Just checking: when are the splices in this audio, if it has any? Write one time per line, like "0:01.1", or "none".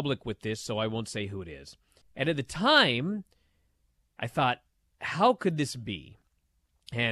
0:02.0